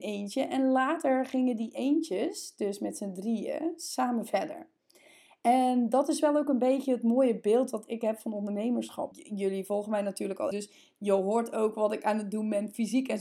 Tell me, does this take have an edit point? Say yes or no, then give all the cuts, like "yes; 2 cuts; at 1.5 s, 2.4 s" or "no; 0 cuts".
yes; 2 cuts; at 9.1 s, 10.5 s